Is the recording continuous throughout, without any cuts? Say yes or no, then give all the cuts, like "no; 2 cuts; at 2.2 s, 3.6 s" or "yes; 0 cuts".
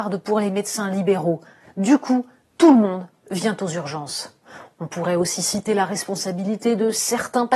yes; 0 cuts